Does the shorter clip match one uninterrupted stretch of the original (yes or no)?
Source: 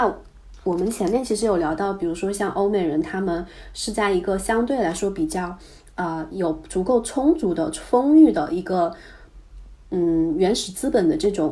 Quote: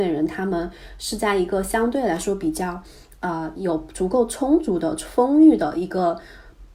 yes